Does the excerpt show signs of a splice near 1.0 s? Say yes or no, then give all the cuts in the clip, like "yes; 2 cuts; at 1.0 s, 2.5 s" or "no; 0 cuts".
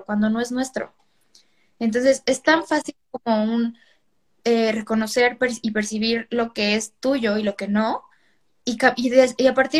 no; 1 cut; at 8.6 s